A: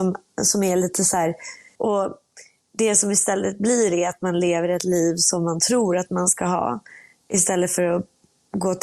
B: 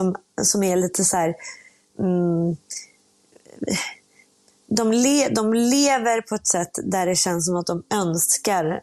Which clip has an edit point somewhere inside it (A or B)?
A